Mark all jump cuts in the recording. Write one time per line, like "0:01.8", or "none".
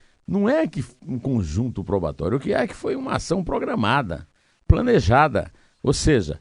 none